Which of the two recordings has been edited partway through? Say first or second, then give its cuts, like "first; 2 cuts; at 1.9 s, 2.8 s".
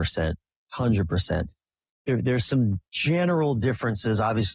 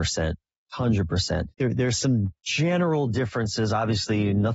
second; 1 cut; at 1.5 s